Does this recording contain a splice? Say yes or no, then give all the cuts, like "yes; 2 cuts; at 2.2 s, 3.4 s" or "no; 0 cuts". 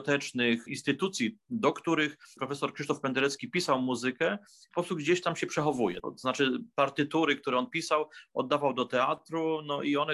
yes; 1 cut; at 6.0 s